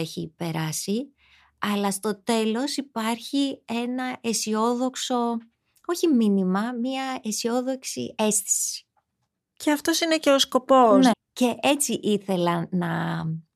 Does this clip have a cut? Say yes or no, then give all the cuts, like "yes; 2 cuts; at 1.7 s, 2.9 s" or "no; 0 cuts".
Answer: yes; 1 cut; at 11.1 s